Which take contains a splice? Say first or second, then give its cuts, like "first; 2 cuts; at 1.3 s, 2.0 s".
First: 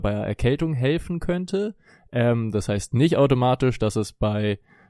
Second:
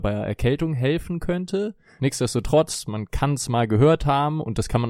second; 1 cut; at 2.0 s